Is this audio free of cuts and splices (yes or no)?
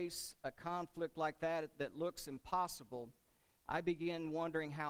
yes